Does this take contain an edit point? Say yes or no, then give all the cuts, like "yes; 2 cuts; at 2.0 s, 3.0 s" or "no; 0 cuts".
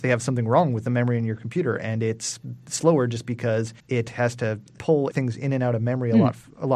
yes; 1 cut; at 3.8 s